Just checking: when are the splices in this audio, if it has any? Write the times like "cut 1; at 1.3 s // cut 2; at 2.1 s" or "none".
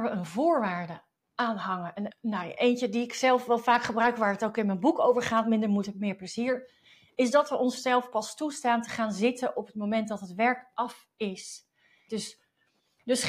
cut 1; at 2.1 s // cut 2; at 12.1 s